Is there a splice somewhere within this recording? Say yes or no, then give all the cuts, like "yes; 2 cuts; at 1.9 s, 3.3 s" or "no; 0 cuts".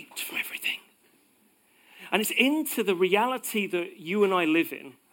yes; 1 cut; at 2.1 s